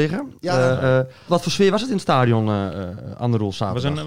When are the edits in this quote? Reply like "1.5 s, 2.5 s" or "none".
1.3 s